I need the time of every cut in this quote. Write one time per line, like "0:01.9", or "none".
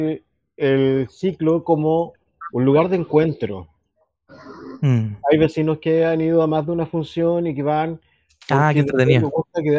none